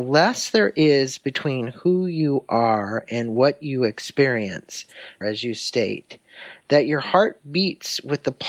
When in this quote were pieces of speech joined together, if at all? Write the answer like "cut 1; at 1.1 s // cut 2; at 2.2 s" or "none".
cut 1; at 5.2 s

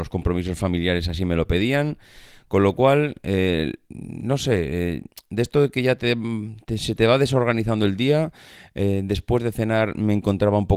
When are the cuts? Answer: none

